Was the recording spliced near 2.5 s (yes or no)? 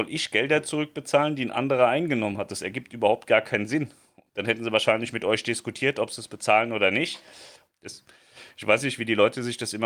no